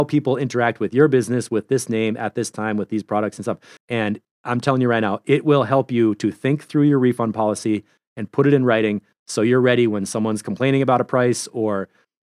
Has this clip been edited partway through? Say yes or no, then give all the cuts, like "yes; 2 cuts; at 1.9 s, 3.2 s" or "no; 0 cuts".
yes; 1 cut; at 3.8 s